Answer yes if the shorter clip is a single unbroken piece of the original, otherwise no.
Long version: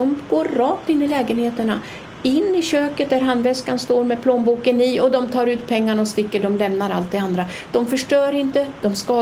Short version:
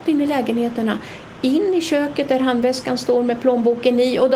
yes